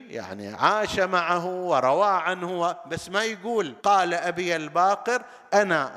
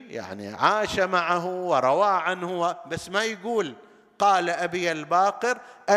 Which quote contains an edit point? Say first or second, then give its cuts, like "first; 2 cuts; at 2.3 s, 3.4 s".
first; 1 cut; at 3.8 s